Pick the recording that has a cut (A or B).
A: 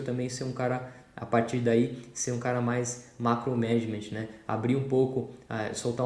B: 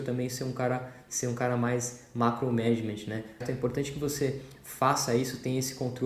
B